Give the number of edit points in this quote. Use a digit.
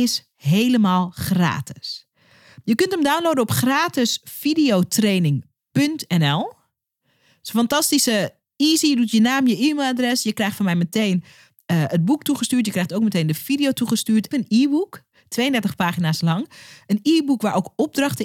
1